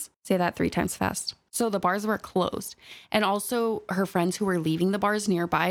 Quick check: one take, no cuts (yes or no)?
no